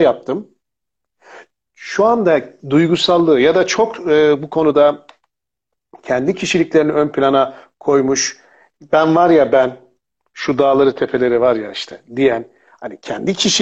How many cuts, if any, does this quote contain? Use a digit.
0